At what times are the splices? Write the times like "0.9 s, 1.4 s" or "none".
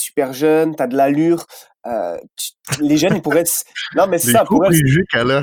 none